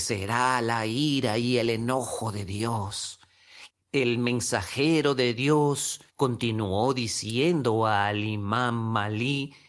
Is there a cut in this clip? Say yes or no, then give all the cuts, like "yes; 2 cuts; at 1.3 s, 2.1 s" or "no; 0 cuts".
yes; 2 cuts; at 3.7 s, 6.1 s